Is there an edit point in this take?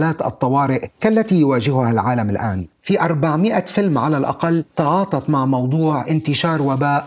yes; 1 cut; at 2.7 s

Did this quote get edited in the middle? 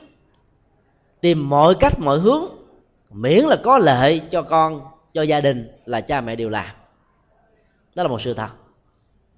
no; 0 cuts

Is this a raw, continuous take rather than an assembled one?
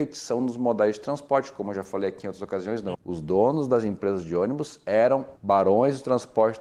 no; 2 cuts; at 2.9 s, 5.4 s

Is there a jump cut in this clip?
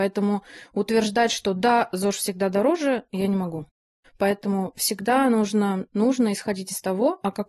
yes; 2 cuts; at 4.0 s, 5.9 s

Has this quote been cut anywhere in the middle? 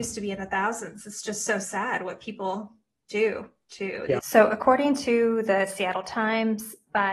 yes; 1 cut; at 4.2 s

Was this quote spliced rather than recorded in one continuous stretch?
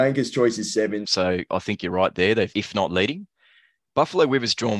yes; 2 cuts; at 1.0 s, 2.5 s

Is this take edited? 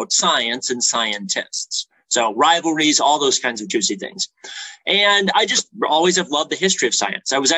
no; 0 cuts

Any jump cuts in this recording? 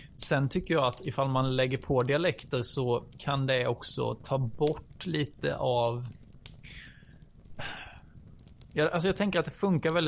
no; 0 cuts

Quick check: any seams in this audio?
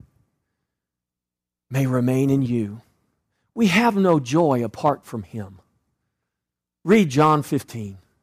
no; 0 cuts

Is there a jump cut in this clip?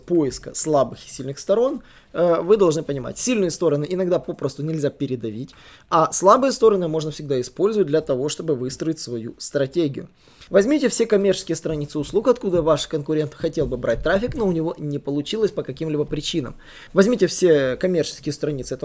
yes; 2 cuts; at 10.5 s, 16.9 s

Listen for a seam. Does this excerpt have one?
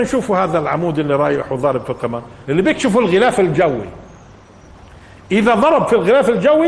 yes; 1 cut; at 2.5 s

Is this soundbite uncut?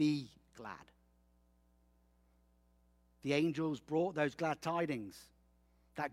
yes; 0 cuts

